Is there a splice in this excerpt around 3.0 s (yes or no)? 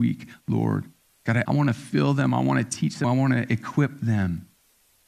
yes